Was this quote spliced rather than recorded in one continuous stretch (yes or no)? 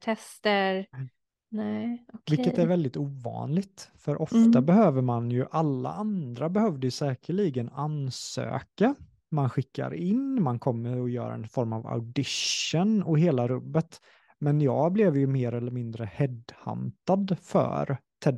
no